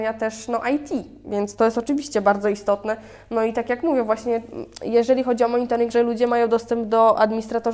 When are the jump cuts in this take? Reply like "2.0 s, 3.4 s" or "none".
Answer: 5.9 s